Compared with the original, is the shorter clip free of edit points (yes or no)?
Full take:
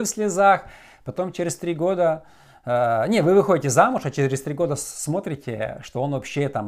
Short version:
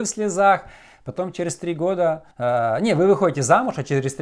no